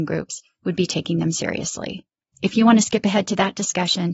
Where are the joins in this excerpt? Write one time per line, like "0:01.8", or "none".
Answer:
0:02.3

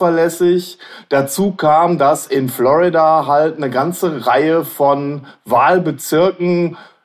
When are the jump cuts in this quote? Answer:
none

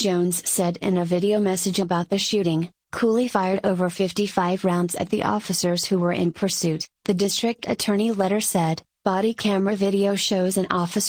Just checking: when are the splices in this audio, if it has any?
0:02.8

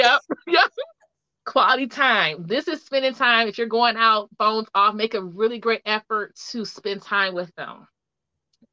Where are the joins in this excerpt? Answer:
0:00.9

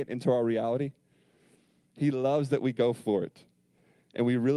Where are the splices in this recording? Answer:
0:01.9

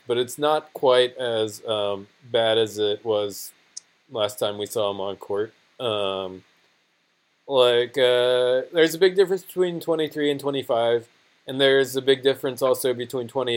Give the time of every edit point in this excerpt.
none

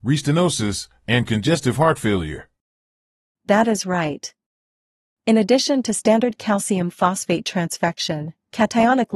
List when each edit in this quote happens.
none

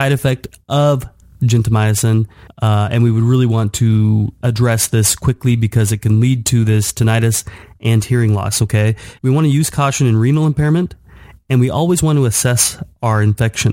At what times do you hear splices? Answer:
0:09.2

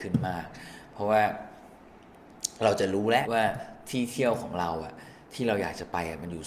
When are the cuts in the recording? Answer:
0:03.2

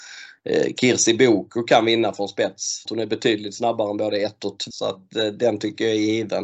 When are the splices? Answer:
0:02.9
0:04.7

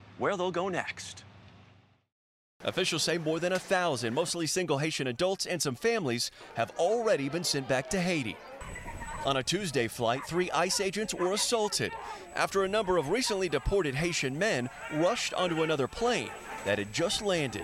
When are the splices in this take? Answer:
0:02.5

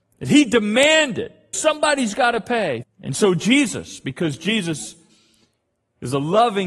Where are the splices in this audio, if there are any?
0:01.5
0:02.8

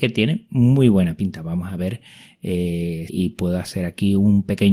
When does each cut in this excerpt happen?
0:03.1

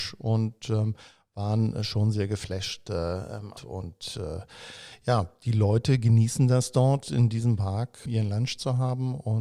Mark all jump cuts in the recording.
0:03.6
0:08.1

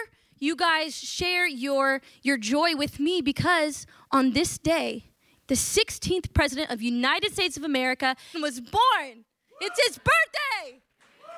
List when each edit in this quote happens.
0:05.3
0:08.3

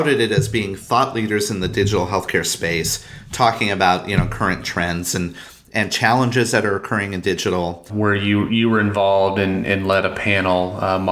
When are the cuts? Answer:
0:07.9

